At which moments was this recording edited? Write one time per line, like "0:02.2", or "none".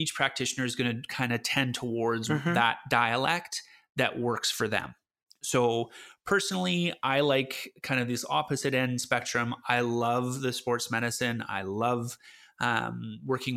none